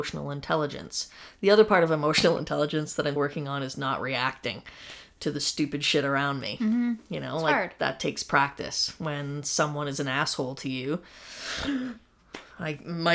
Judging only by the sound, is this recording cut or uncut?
cut